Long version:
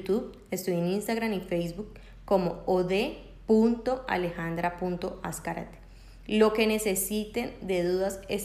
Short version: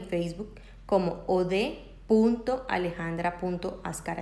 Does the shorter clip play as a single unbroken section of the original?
yes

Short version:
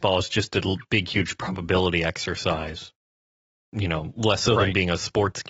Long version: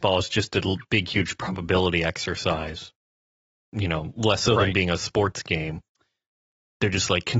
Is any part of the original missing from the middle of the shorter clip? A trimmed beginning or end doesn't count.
no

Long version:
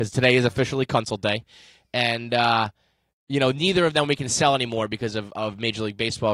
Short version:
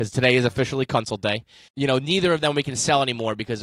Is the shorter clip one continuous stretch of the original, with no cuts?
no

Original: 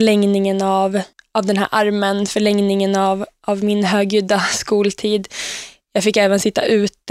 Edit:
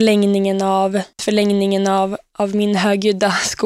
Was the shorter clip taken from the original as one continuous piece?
no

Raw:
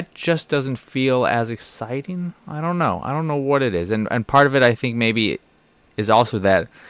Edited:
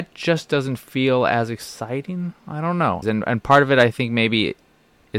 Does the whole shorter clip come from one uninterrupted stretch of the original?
no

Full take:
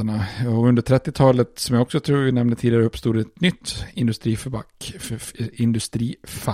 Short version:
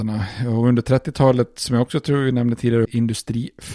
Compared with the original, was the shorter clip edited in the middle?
yes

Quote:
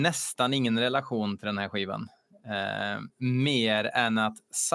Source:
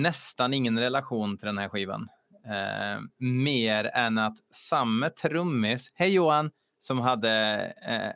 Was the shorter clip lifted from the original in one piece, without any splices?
yes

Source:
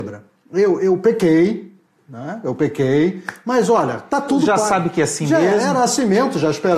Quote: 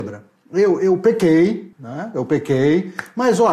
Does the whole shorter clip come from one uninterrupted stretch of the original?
no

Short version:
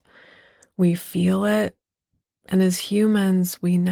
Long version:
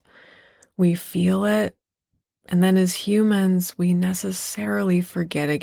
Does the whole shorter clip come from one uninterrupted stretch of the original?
no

